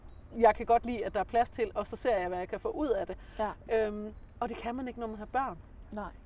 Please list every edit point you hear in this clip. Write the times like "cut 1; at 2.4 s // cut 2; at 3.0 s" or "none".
none